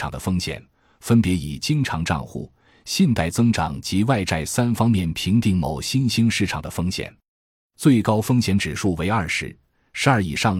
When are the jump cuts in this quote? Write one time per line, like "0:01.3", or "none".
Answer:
none